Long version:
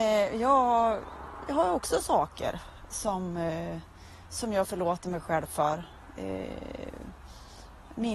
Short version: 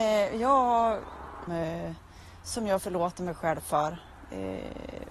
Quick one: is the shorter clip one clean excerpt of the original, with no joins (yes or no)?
no